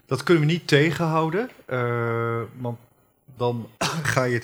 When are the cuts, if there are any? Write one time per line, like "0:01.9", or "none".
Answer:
0:03.4